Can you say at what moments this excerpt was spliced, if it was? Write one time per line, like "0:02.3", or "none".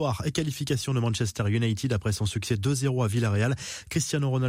none